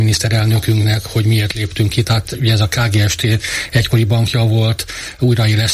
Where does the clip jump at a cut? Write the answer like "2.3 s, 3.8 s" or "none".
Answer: 2.0 s